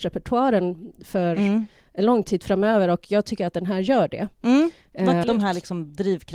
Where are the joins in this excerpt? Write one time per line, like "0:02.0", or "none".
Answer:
0:05.2